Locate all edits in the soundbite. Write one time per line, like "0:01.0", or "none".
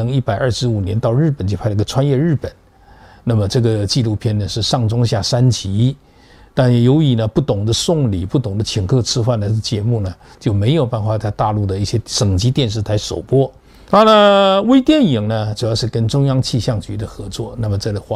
0:13.9